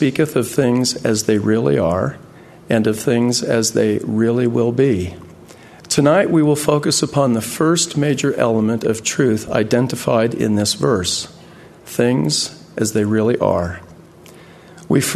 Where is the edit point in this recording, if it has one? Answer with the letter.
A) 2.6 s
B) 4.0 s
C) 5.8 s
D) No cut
C